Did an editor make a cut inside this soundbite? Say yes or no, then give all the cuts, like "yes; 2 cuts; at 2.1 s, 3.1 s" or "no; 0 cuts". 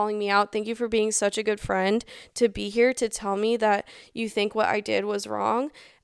no; 0 cuts